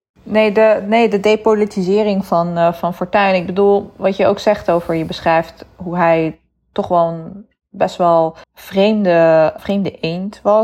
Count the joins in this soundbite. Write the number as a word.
two